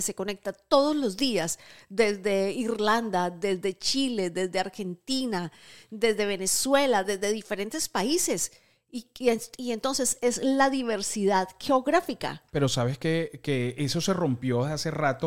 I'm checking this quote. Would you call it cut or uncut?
uncut